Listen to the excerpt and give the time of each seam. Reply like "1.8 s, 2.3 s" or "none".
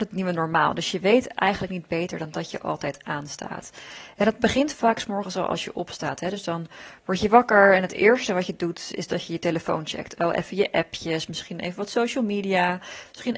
none

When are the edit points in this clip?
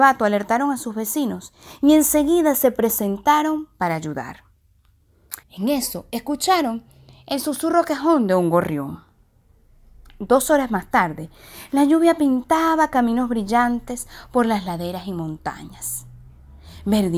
5.4 s

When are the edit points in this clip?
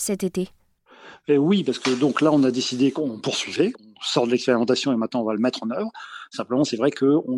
none

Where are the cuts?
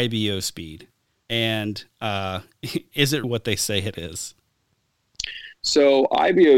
1.2 s, 3.2 s

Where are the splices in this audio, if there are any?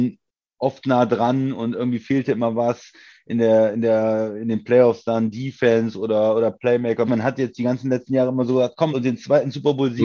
7.1 s, 8.9 s

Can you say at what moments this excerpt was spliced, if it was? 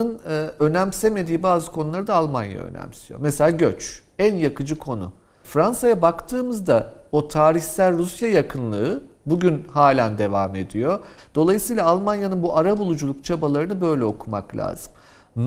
5.4 s, 11.2 s

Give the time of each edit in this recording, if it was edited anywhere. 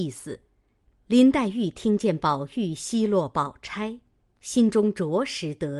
0.9 s

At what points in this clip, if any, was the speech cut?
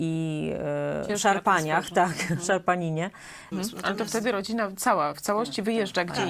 3.5 s

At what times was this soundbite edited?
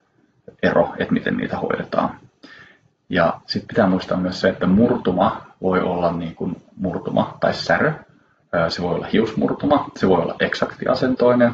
none

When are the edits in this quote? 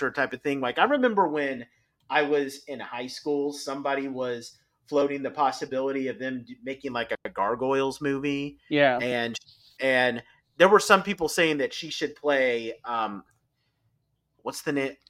none

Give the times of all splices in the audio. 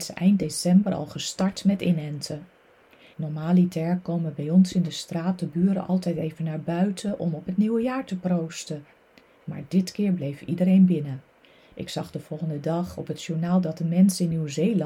3.1 s

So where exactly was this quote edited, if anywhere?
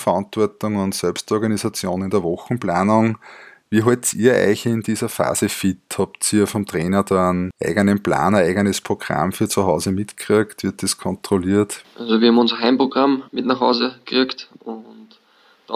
11.8 s, 13.3 s

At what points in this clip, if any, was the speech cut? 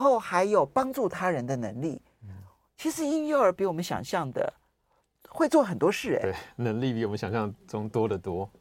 none

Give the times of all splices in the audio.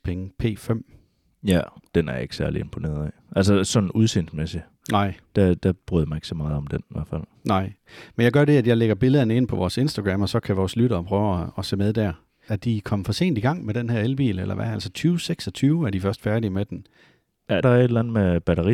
12.5 s, 17.6 s

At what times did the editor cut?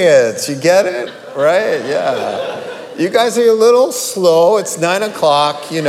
none

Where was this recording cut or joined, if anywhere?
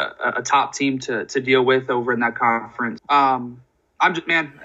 3.0 s

